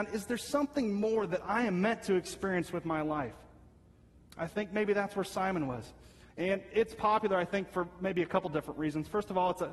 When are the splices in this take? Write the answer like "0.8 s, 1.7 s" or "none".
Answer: 6.3 s